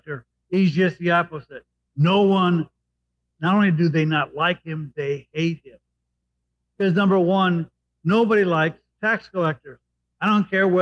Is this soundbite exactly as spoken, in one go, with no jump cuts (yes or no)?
yes